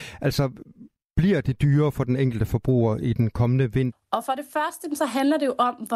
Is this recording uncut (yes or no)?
no